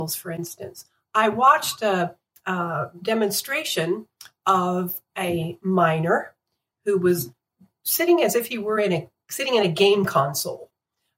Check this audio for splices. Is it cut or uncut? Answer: uncut